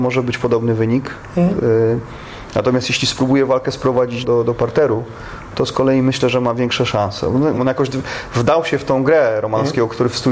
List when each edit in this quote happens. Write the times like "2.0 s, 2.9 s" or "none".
4.2 s, 7.6 s